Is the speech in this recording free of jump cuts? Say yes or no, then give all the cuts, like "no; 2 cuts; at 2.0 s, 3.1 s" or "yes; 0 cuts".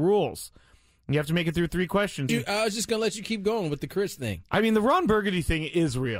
no; 1 cut; at 2.3 s